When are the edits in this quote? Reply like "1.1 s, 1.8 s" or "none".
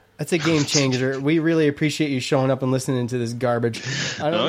none

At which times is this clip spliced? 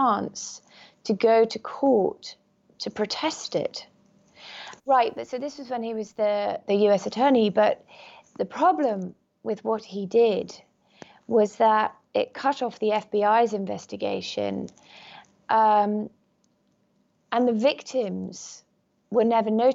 4.8 s

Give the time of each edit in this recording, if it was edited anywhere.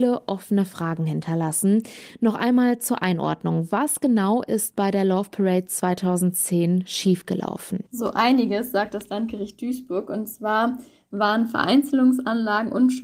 7.9 s

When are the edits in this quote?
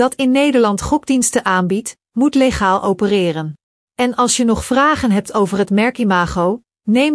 3.8 s

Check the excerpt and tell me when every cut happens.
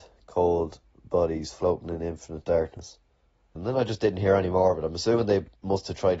3.6 s

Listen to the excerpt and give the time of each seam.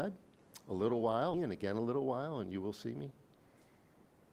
1.3 s

